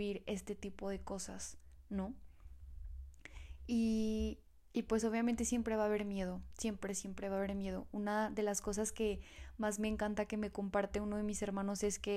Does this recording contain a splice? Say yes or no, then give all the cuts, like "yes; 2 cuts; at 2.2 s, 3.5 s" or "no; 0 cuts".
no; 0 cuts